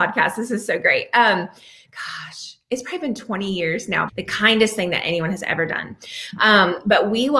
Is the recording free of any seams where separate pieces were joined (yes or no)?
no